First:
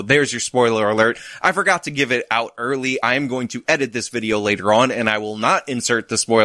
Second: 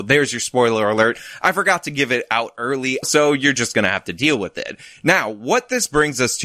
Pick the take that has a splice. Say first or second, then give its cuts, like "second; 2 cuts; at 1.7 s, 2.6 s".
second; 1 cut; at 3.0 s